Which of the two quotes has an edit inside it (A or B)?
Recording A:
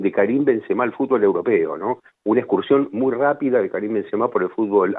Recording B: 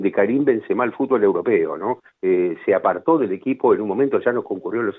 B